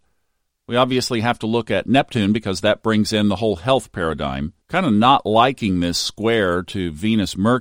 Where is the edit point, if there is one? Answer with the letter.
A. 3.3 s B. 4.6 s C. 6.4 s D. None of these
B